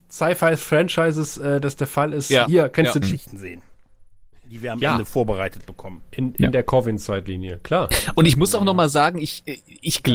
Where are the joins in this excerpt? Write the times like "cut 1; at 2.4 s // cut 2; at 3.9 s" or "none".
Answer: cut 1; at 3.0 s